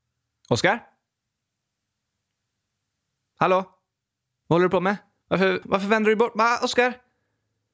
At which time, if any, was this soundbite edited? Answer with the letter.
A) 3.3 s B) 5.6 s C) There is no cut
B